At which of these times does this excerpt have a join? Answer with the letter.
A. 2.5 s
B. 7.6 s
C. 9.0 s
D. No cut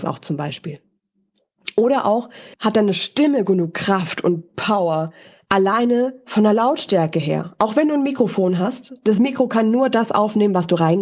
A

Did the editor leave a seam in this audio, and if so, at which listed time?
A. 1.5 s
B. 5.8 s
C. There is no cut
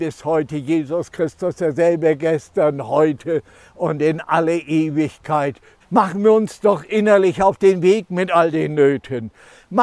B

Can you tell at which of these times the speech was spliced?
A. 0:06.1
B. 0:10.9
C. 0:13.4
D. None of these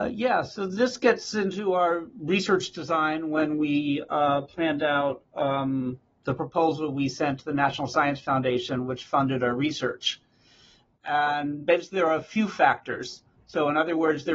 C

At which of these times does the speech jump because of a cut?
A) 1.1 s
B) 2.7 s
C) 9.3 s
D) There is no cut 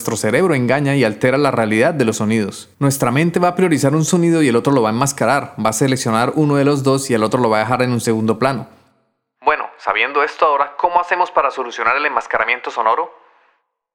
B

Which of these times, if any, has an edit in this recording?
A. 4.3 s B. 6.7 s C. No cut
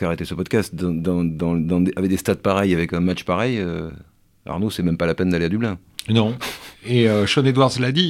C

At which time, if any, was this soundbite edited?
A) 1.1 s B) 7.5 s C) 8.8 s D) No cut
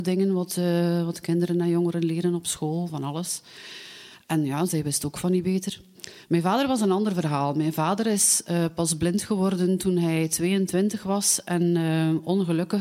D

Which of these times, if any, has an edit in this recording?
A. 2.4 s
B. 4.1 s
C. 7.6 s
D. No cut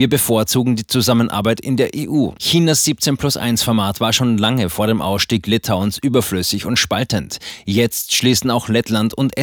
A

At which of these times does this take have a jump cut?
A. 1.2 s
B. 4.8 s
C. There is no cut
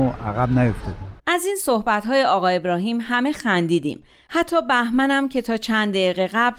A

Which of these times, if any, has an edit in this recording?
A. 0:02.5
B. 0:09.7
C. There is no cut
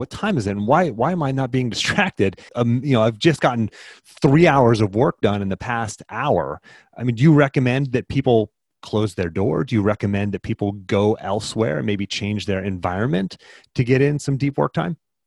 A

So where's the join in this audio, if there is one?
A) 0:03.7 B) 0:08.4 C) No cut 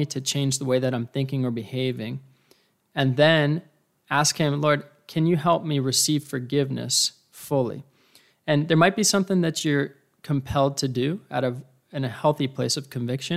C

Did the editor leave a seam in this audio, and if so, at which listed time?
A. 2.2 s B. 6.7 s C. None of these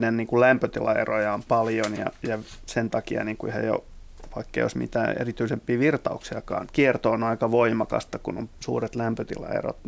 B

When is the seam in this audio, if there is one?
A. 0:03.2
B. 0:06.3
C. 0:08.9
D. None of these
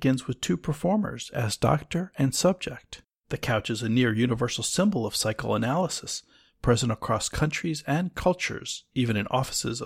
A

